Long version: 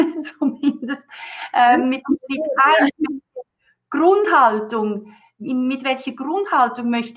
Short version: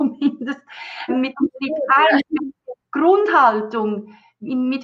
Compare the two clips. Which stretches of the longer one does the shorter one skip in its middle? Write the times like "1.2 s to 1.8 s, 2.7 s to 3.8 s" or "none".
1.5 s to 1.8 s, 3.5 s to 3.8 s